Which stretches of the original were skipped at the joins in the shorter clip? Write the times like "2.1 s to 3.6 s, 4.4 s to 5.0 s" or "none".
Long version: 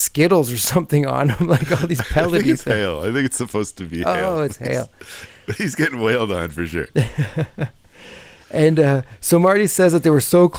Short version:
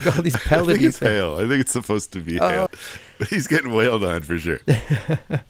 4.3 s to 4.9 s